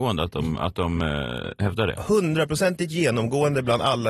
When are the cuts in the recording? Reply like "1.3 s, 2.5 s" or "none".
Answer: none